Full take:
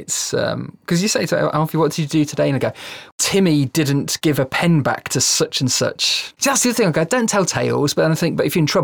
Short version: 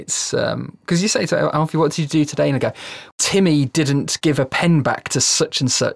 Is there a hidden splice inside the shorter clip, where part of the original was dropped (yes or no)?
no